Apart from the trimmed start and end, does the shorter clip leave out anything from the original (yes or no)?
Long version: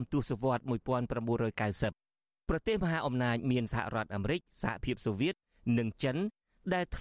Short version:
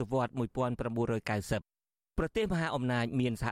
no